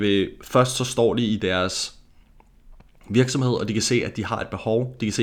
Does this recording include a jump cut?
no; 0 cuts

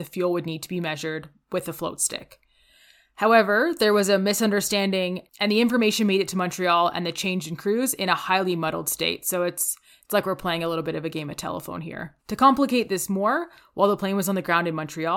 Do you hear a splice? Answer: yes; 1 cut; at 12.2 s

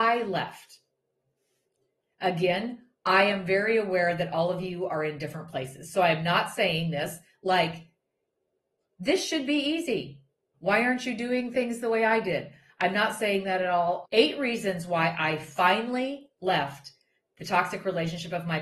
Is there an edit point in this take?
yes; 2 cuts; at 10.5 s, 14.0 s

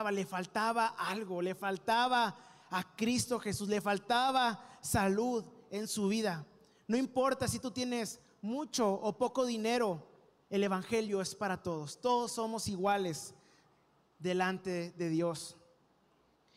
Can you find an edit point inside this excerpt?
no; 0 cuts

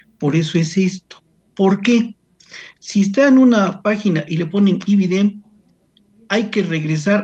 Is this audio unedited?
yes; 0 cuts

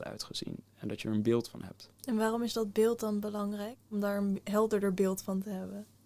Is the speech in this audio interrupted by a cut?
yes; 2 cuts; at 1.9 s, 3.8 s

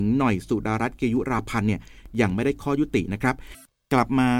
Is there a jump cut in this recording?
no; 0 cuts

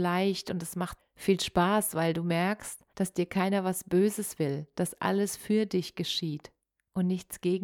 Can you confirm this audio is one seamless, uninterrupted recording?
no; 2 cuts; at 1.0 s, 2.9 s

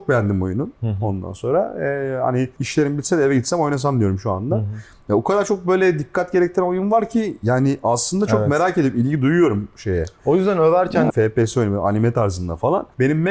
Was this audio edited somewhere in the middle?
yes; 1 cut; at 11.1 s

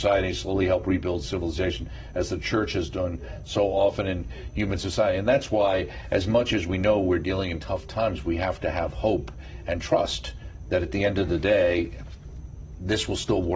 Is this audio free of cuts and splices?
yes; 0 cuts

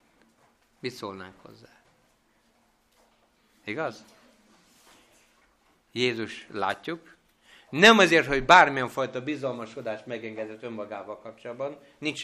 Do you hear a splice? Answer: no; 0 cuts

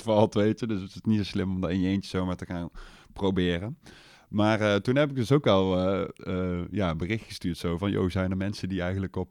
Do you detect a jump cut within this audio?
no; 0 cuts

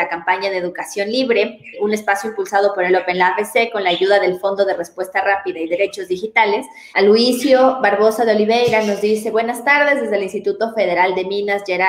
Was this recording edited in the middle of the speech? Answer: yes; 2 cuts; at 1.7 s, 6.9 s

